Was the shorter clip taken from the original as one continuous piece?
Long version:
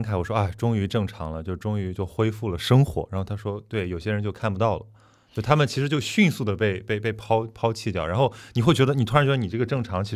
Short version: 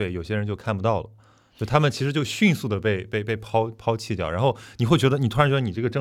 yes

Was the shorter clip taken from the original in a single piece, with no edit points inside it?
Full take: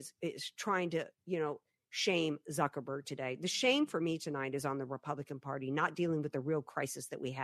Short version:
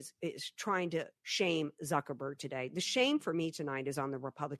no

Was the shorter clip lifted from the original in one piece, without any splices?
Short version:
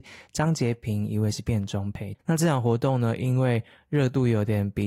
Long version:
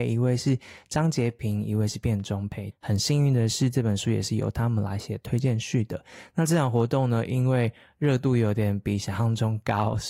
no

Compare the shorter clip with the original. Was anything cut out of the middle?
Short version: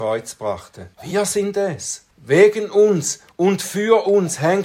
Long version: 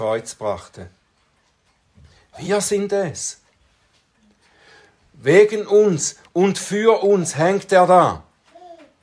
yes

